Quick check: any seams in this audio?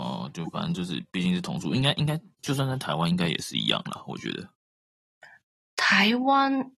no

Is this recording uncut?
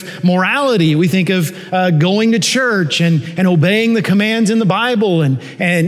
yes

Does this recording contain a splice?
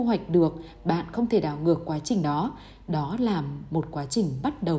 no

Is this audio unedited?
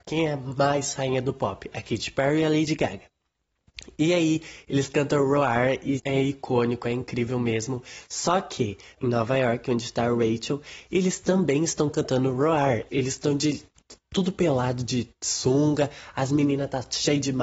no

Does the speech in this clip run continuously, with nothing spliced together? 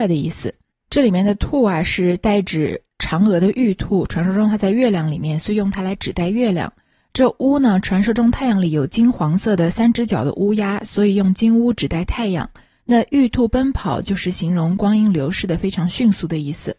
no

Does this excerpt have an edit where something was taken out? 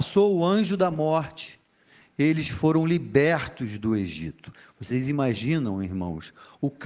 no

